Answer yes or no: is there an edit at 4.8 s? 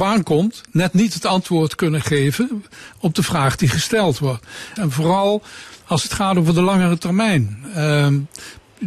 yes